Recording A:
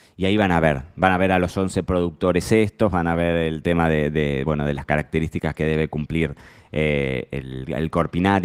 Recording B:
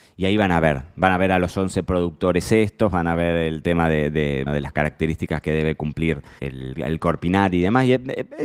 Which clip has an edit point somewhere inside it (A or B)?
B